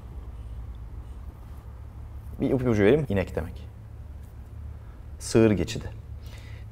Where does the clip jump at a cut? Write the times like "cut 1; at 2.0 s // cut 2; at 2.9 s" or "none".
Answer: cut 1; at 3.0 s // cut 2; at 5.2 s